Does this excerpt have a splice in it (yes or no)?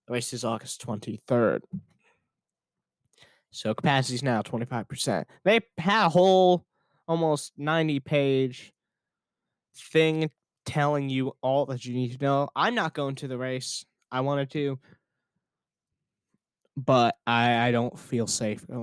no